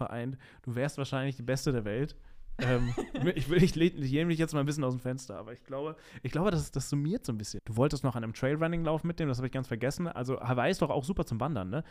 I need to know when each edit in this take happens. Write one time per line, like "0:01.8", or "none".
0:07.6